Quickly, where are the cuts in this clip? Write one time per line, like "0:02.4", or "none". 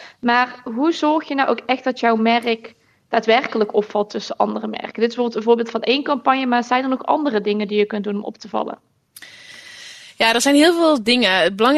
none